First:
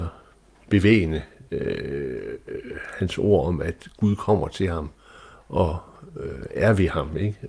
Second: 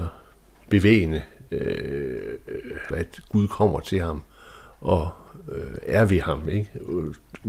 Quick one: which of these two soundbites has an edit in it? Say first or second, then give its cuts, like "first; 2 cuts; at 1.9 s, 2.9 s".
second; 1 cut; at 2.9 s